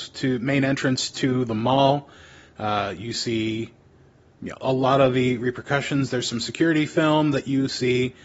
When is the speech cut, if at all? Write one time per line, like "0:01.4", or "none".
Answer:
none